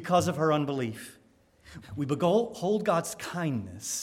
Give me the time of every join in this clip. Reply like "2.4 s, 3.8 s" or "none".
1.8 s